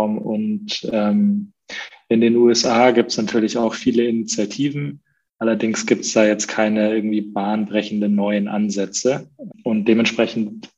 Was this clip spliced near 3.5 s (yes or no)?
no